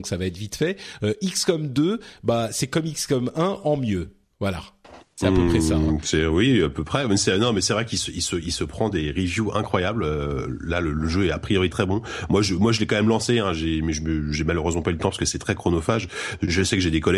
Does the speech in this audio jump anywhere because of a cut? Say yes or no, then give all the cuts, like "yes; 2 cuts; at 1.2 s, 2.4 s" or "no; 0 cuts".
yes; 1 cut; at 11.7 s